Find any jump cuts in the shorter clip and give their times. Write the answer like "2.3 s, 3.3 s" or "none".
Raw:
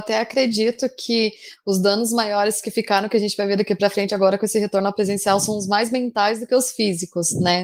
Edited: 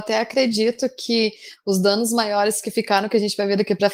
none